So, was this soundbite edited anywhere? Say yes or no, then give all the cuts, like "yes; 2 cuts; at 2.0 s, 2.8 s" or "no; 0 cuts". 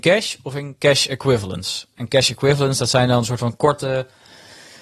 no; 0 cuts